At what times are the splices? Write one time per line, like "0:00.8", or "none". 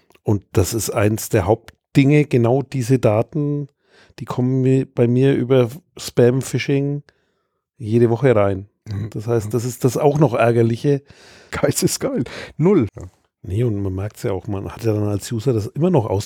0:11.5
0:12.9

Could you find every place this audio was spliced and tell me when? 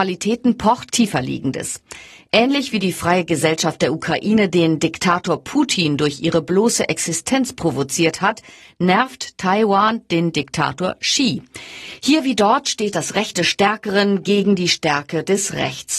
0:00.9

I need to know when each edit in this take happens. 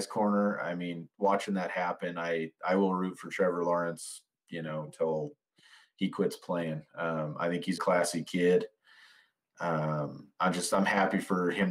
0:07.8

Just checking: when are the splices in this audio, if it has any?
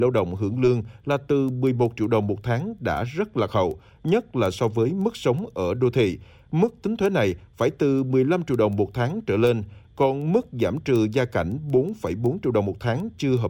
none

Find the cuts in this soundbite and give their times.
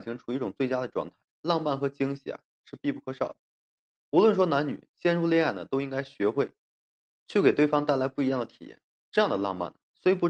none

